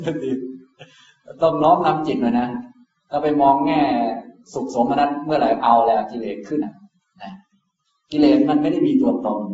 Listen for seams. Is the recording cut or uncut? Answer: cut